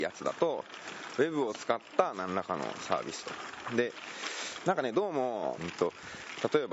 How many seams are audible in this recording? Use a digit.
1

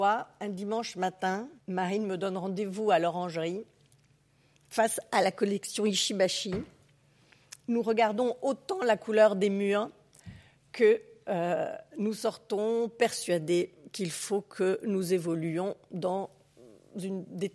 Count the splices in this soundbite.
2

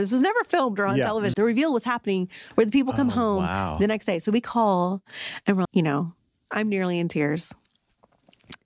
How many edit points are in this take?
2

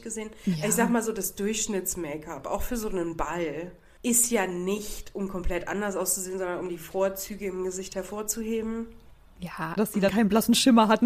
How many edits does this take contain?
1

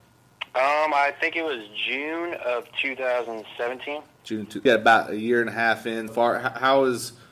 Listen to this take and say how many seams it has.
2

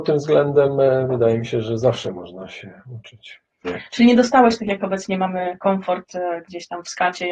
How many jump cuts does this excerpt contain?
1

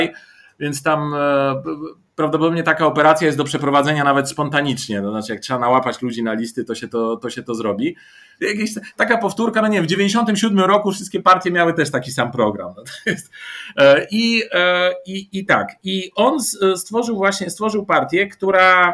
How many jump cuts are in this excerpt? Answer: 2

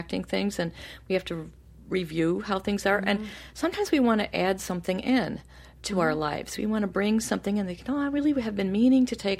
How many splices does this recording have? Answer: 0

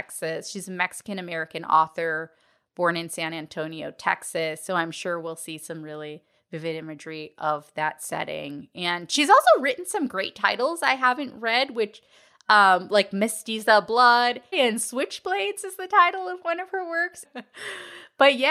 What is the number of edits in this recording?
2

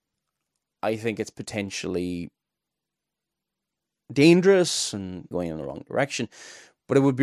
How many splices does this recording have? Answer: 1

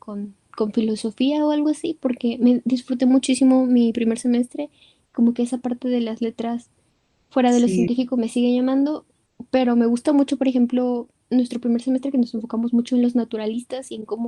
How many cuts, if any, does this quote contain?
0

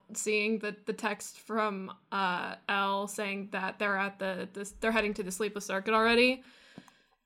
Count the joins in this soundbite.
0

